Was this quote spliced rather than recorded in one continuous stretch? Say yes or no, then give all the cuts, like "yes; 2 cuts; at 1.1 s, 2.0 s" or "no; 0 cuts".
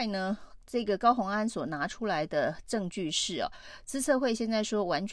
no; 0 cuts